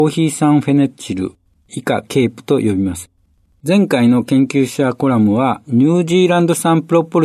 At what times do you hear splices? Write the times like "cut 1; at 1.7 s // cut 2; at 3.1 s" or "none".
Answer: cut 1; at 3.5 s